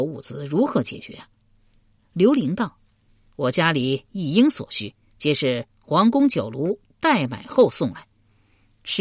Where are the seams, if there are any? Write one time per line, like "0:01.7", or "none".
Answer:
none